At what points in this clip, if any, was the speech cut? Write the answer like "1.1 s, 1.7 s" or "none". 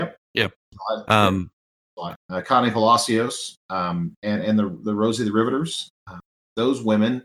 2.1 s